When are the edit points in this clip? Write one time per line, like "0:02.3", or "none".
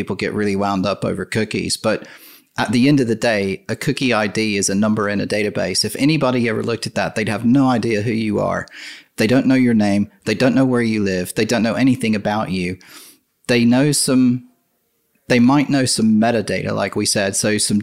none

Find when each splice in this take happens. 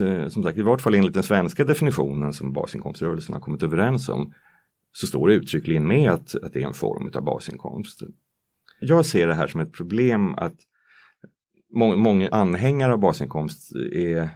0:12.3

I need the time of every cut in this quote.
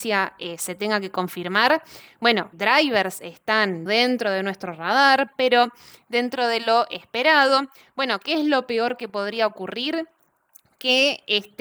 0:02.5
0:03.9
0:05.3

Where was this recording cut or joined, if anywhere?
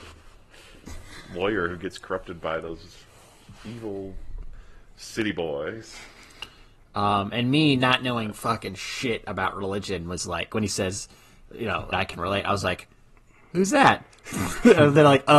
0:11.9

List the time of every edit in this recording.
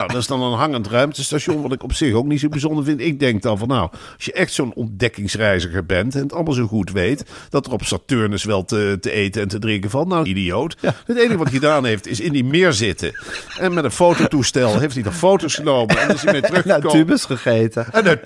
0:10.3

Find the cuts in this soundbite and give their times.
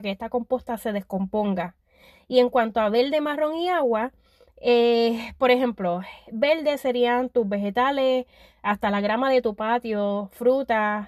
none

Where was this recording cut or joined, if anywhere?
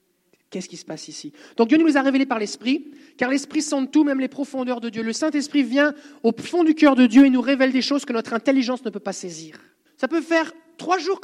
0:09.9

